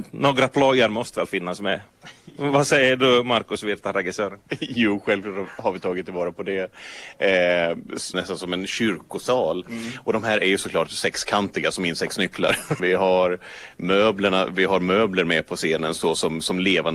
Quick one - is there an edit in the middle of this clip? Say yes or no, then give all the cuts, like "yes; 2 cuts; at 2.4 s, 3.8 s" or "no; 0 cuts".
yes; 2 cuts; at 8.1 s, 12.8 s